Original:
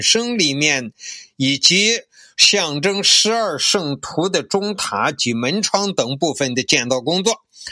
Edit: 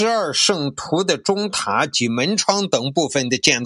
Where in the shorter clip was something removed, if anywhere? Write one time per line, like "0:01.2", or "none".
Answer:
none